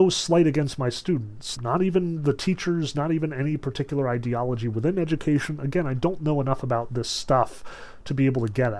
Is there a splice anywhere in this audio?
yes; 1 cut; at 1.6 s

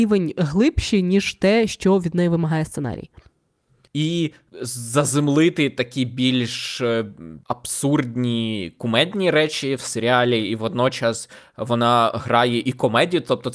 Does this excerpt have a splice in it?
yes; 1 cut; at 3.9 s

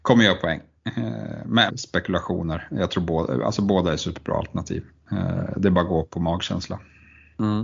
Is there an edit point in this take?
yes; 1 cut; at 1.7 s

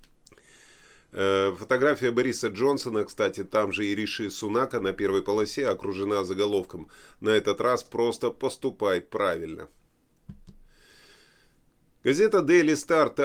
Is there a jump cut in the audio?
no; 0 cuts

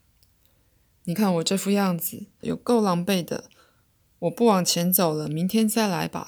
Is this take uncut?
no; 2 cuts; at 1.2 s, 2.4 s

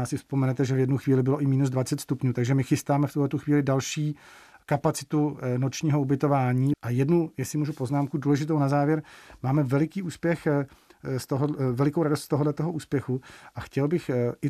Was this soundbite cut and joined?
yes; 1 cut; at 6.7 s

